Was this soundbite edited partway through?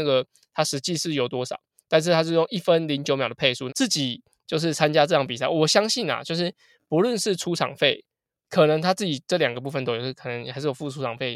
yes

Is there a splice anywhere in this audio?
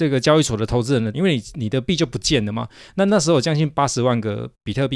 yes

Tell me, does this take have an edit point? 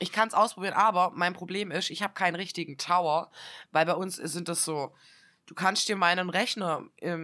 no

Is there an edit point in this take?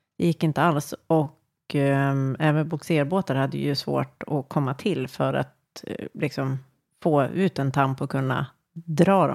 no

